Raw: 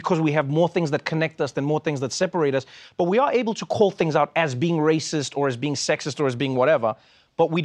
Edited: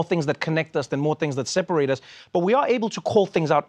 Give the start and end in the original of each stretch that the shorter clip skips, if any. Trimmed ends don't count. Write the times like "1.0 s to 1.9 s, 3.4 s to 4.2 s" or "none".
none